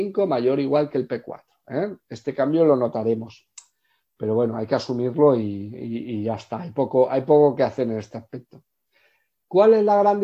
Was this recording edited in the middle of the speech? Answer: no; 0 cuts

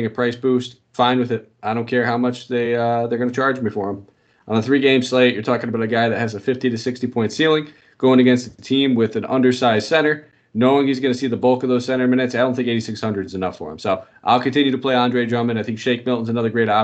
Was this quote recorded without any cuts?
yes; 0 cuts

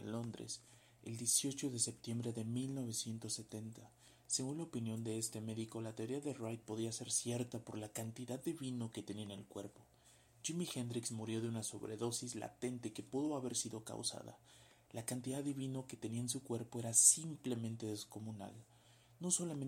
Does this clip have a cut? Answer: no; 0 cuts

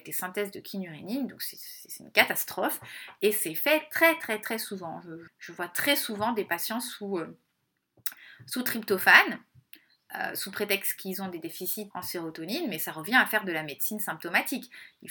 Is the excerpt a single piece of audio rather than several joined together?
no; 2 cuts; at 5.3 s, 11.9 s

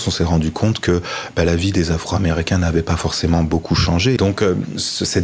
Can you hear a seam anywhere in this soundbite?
yes; 1 cut; at 4.2 s

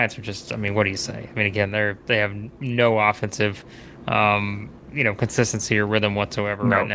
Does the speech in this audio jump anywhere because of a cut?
no; 0 cuts

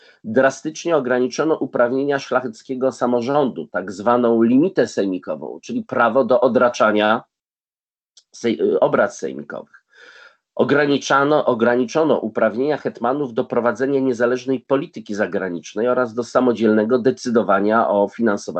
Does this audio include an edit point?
no; 0 cuts

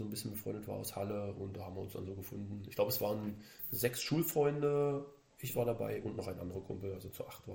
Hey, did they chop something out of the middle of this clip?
no; 0 cuts

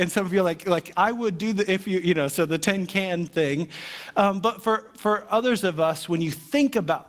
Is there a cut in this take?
no; 0 cuts

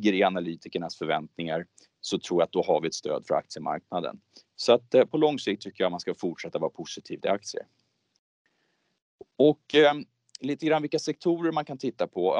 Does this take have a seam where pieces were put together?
no; 0 cuts

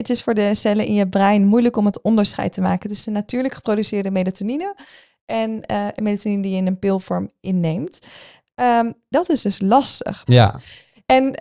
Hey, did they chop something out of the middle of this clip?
yes; 2 cuts; at 9.1 s, 10.3 s

